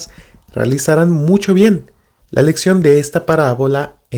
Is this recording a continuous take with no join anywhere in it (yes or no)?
no